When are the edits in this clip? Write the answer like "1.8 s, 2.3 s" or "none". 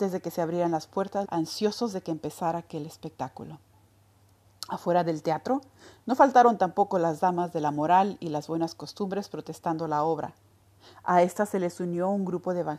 1.2 s